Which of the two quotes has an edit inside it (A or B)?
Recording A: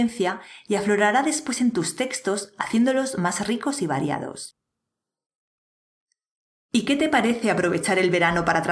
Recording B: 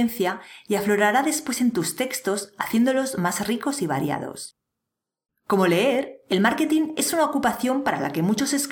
B